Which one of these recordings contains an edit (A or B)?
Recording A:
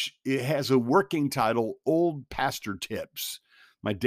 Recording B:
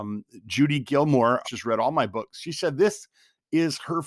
B